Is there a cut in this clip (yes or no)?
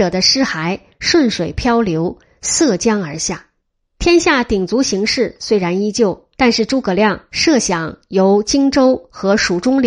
yes